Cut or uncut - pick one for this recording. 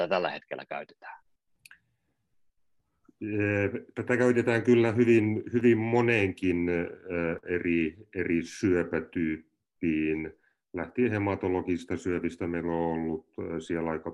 uncut